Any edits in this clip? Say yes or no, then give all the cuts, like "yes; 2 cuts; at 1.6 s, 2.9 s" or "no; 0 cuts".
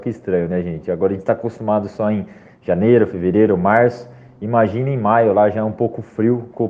no; 0 cuts